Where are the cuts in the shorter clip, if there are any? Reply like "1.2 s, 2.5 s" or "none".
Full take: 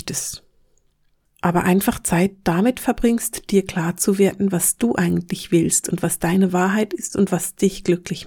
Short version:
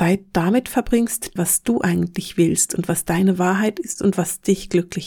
1.4 s